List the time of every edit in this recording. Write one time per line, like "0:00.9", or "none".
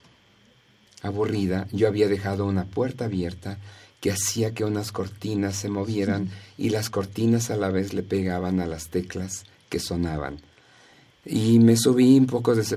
none